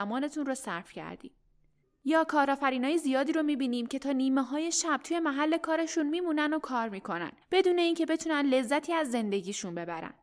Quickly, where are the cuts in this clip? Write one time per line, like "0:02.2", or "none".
0:01.8
0:07.4